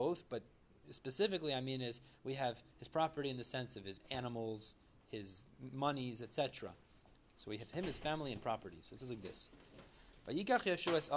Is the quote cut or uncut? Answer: uncut